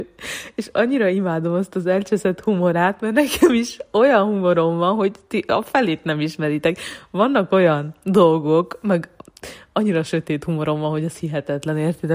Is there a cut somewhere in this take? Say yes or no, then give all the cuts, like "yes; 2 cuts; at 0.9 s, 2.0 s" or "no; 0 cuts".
no; 0 cuts